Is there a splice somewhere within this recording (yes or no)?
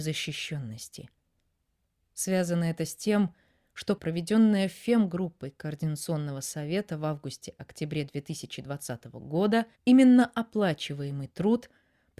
yes